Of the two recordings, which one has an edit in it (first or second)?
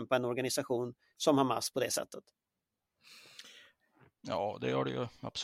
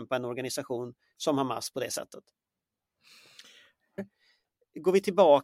second